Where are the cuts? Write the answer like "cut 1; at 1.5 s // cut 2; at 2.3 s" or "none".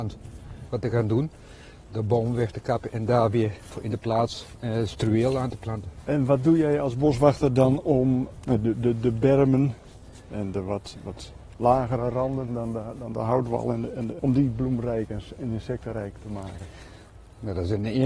cut 1; at 12.5 s // cut 2; at 14.2 s